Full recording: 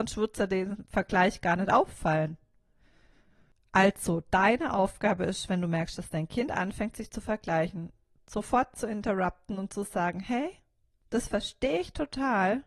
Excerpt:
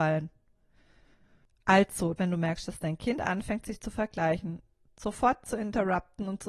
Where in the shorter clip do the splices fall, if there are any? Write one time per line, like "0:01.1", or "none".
0:02.2